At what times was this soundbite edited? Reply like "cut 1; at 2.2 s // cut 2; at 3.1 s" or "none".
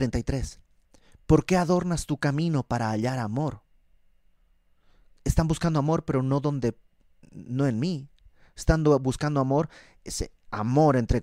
none